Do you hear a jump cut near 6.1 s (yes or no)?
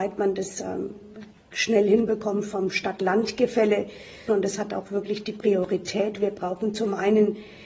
no